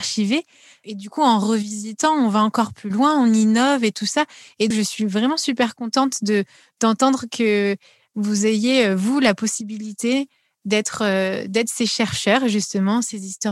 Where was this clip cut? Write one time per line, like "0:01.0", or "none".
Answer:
0:04.7